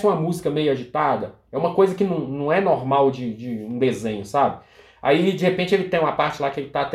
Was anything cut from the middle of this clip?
no; 0 cuts

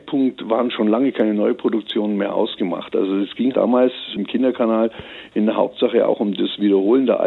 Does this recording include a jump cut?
yes; 1 cut; at 3.5 s

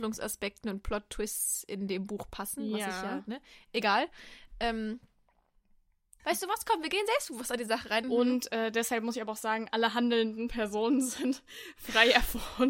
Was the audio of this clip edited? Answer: yes; 3 cuts; at 6.2 s, 8.0 s, 9.7 s

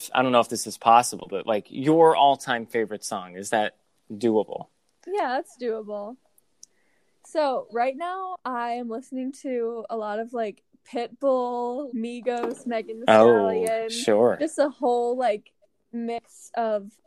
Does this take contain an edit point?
yes; 1 cut; at 11.9 s

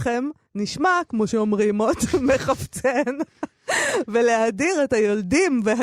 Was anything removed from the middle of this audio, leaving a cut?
no; 0 cuts

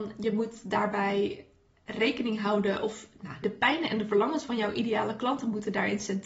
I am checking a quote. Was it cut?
yes; 1 cut; at 3.4 s

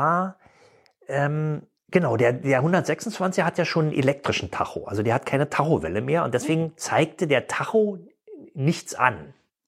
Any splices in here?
yes; 1 cut; at 1.8 s

